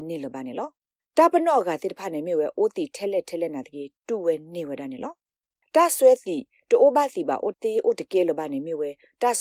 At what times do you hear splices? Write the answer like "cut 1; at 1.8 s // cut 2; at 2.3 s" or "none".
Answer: cut 1; at 7.5 s